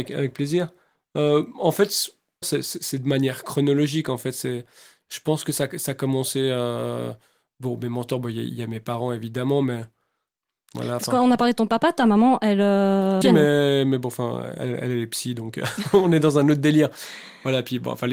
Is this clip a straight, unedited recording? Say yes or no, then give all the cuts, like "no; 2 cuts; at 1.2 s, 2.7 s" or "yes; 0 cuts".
no; 2 cuts; at 2.4 s, 13.2 s